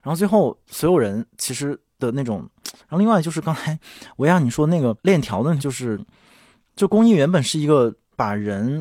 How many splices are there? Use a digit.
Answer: 2